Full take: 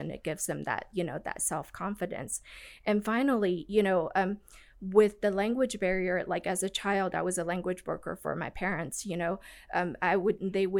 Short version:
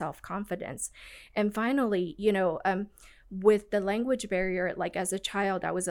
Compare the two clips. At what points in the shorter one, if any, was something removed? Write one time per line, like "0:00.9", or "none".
none